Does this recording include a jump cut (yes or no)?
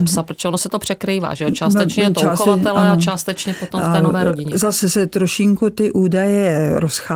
no